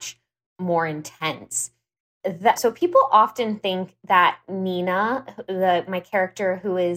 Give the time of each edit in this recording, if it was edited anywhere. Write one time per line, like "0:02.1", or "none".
0:02.6